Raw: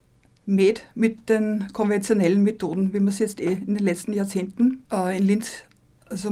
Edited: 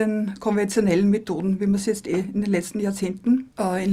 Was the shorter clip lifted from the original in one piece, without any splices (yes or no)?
yes